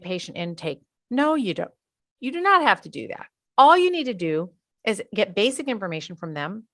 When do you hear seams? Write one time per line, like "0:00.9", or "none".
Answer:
none